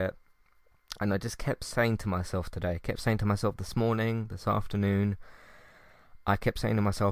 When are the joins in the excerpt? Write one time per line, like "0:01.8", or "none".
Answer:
none